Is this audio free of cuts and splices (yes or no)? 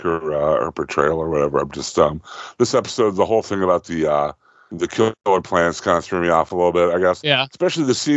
yes